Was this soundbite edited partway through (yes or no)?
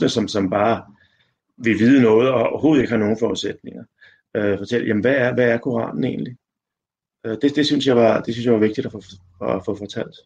no